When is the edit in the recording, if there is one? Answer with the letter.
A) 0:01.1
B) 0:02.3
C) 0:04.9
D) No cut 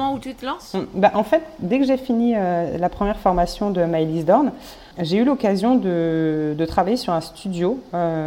C